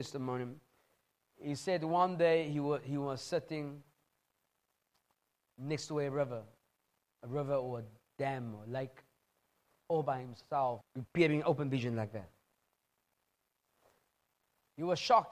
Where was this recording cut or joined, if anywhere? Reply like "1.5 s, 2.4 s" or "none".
10.8 s